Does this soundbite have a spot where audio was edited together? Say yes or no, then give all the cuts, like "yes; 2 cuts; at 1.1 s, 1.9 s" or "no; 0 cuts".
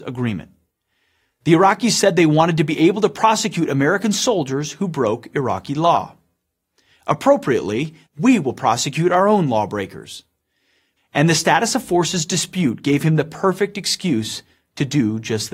yes; 2 cuts; at 8.1 s, 11.0 s